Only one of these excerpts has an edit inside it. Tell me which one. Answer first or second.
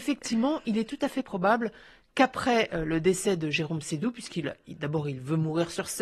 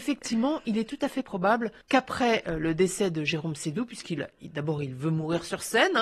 second